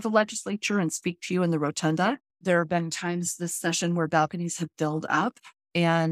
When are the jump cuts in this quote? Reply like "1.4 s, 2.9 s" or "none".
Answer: 2.3 s